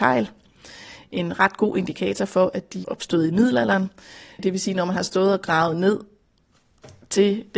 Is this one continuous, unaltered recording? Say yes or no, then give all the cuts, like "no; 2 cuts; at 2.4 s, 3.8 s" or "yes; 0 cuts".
no; 1 cut; at 2.8 s